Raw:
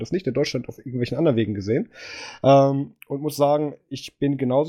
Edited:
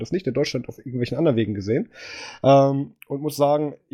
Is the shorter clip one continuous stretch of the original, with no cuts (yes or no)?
yes